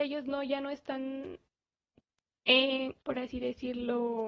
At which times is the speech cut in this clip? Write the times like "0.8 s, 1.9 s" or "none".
3.0 s